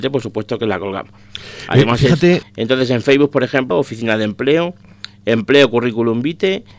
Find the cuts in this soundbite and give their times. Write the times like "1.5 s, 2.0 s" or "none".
2.4 s, 3.7 s